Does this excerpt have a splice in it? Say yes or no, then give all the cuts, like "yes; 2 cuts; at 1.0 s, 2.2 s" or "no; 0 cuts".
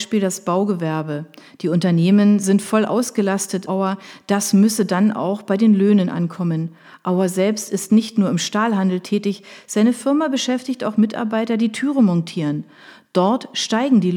yes; 1 cut; at 3.7 s